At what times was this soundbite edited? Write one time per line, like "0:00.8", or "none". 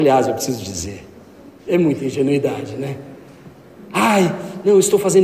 0:01.7